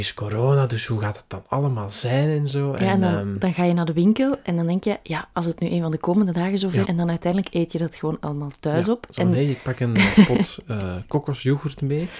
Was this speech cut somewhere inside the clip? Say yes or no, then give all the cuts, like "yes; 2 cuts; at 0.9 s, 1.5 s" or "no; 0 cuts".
yes; 1 cut; at 6.8 s